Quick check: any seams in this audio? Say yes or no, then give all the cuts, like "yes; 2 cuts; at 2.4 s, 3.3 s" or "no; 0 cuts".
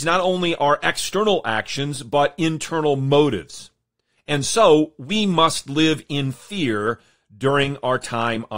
no; 0 cuts